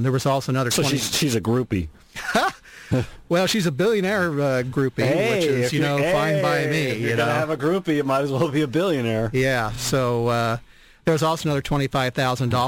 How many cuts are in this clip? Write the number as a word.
zero